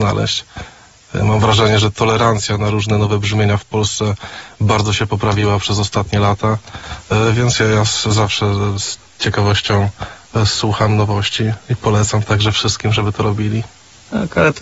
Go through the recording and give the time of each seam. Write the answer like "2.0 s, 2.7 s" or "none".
11.6 s